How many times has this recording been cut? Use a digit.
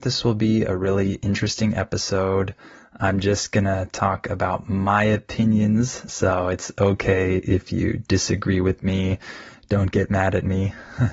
0